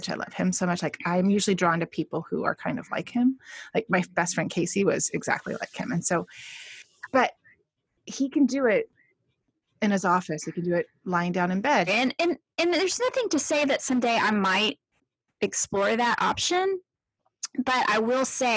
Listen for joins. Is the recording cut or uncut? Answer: cut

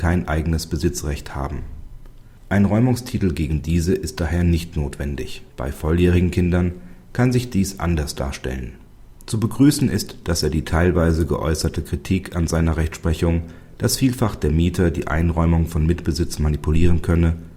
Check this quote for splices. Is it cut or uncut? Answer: cut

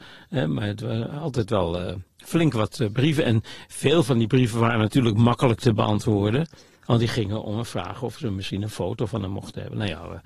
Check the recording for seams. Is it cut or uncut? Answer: uncut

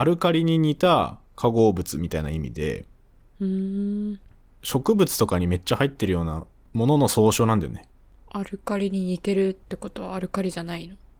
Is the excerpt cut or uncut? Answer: uncut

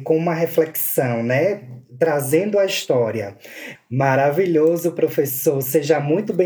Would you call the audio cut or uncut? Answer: cut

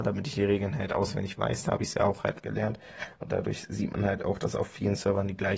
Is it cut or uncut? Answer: uncut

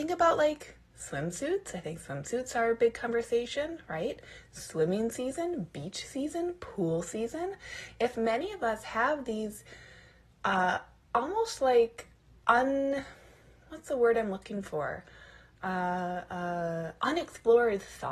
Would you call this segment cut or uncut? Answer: uncut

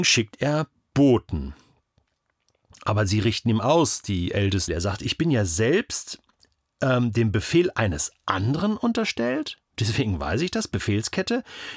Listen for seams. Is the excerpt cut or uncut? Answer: cut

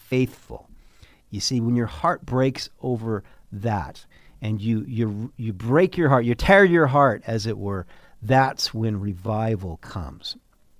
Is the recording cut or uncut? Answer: uncut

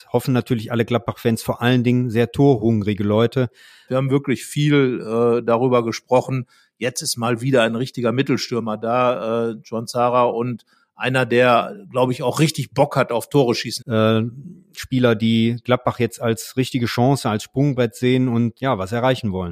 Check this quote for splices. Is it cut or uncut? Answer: cut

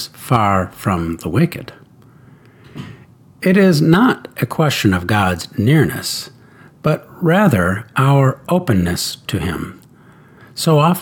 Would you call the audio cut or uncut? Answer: uncut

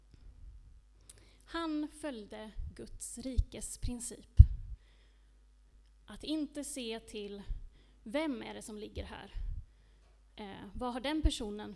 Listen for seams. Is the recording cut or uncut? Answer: uncut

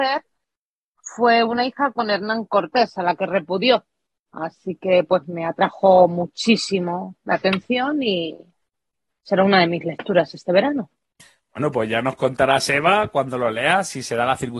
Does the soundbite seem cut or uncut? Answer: cut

